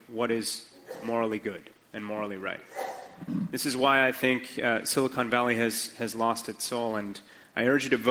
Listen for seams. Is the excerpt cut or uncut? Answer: uncut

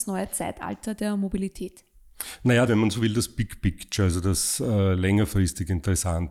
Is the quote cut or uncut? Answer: cut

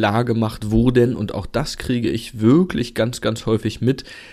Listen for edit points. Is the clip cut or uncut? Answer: uncut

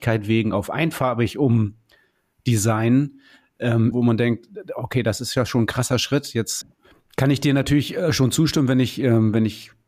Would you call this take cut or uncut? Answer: cut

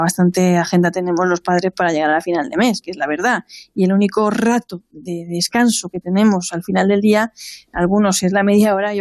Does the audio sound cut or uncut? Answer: uncut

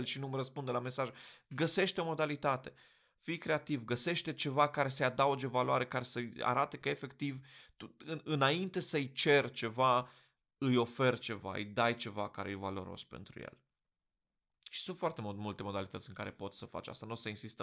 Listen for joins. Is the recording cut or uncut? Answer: uncut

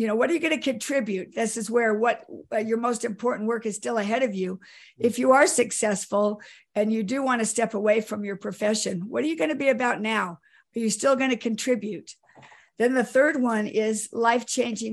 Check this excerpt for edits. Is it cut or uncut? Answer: uncut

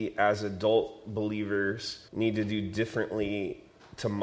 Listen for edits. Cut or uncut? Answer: cut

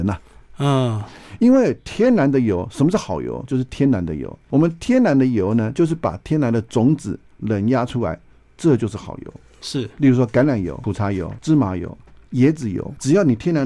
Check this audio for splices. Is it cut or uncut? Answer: uncut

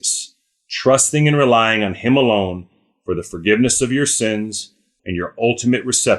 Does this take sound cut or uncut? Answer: cut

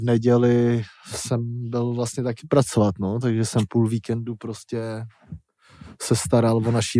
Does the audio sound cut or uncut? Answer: uncut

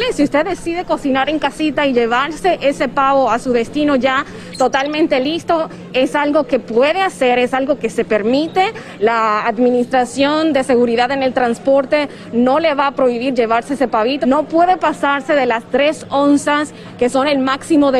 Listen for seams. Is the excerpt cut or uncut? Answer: cut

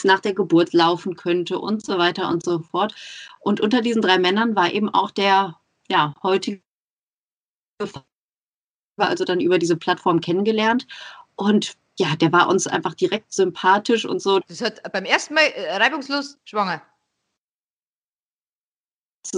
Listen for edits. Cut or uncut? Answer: cut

